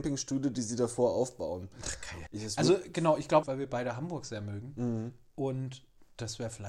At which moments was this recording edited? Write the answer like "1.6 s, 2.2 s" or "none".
2.3 s, 3.4 s